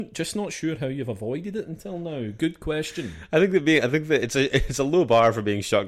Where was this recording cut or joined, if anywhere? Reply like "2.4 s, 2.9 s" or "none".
none